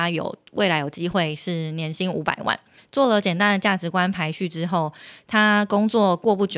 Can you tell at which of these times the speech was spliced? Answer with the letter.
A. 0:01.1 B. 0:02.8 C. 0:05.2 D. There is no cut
B